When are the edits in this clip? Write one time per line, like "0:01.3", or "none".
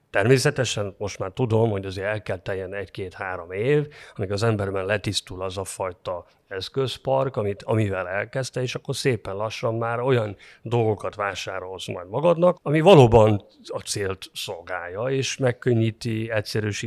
0:12.5